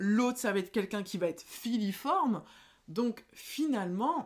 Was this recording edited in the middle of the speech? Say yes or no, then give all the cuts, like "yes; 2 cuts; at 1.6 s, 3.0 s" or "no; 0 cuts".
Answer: no; 0 cuts